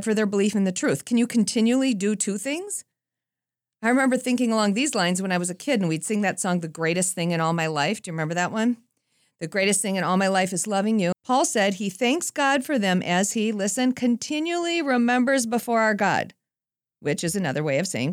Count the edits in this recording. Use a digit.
1